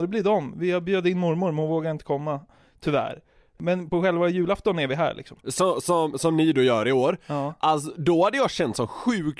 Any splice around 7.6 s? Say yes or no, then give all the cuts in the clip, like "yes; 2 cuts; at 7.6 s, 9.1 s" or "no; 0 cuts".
no; 2 cuts; at 3.6 s, 5.4 s